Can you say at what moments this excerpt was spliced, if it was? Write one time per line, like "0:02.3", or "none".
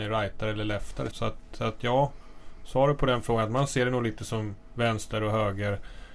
0:01.1

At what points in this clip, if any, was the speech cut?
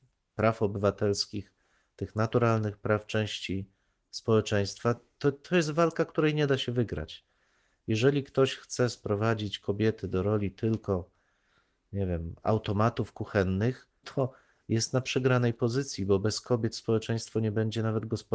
0:14.0

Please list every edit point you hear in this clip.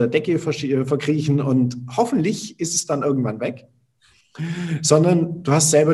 none

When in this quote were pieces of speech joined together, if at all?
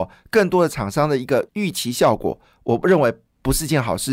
0:01.5

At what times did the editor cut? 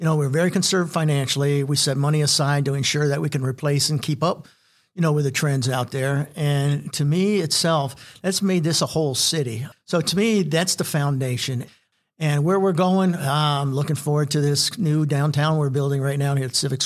none

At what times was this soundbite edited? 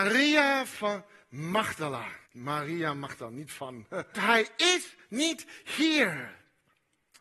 0:02.2
0:04.1

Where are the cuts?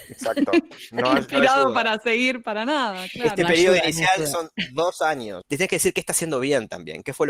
0:05.4

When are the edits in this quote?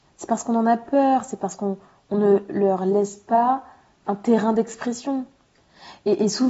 none

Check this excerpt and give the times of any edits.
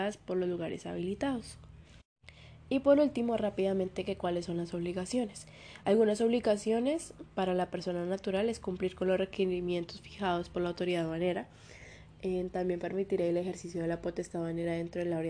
none

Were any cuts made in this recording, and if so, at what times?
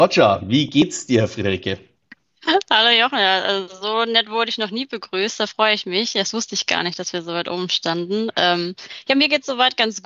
none

